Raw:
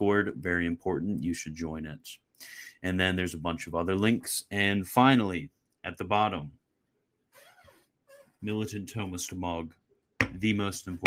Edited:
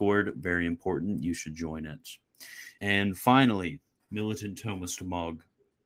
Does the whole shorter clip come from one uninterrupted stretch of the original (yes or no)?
no